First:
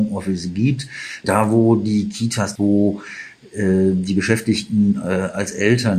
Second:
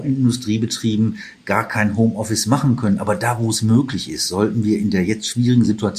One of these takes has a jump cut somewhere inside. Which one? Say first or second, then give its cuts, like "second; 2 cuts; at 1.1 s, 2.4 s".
first; 2 cuts; at 1.2 s, 2.6 s